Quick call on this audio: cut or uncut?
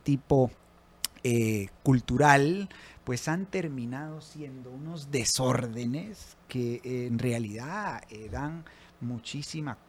uncut